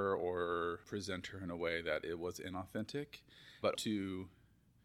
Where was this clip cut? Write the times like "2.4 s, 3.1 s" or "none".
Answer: 3.7 s